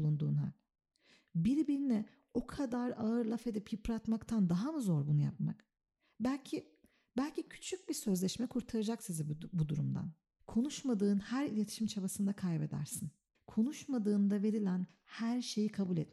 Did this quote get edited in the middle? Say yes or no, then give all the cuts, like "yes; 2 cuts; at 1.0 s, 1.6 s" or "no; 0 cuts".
yes; 2 cuts; at 10.4 s, 13.3 s